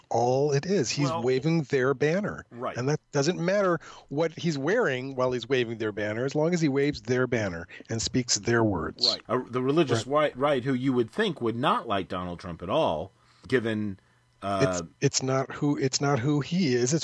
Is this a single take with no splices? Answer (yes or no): no